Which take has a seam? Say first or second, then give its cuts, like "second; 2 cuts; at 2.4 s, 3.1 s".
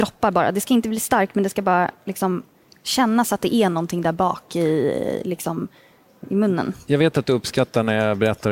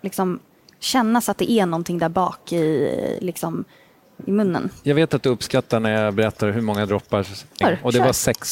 second; 1 cut; at 7.6 s